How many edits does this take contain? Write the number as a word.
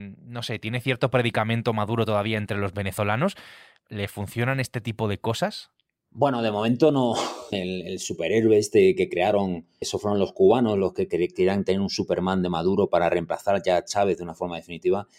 two